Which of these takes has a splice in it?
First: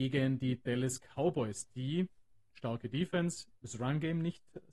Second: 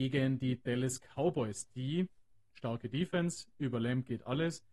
first; 1 cut; at 3.5 s

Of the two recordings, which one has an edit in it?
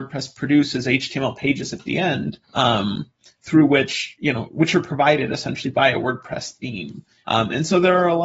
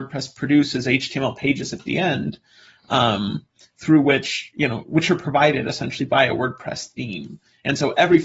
first; 2 cuts; at 2.4 s, 7.2 s

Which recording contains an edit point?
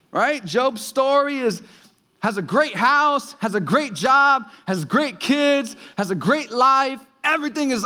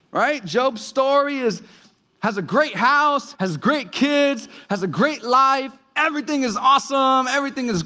second; 1 cut; at 3.4 s

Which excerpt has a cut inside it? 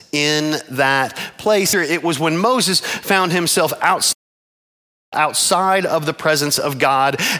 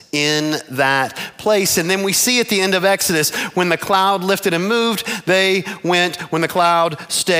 first; 1 cut; at 1.7 s

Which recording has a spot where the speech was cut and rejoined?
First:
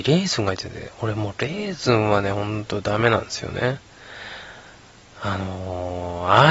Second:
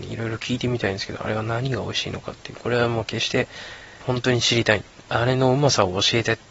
second; 1 cut; at 4.0 s

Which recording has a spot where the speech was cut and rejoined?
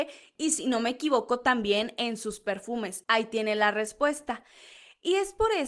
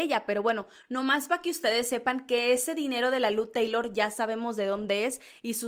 first; 1 cut; at 3.0 s

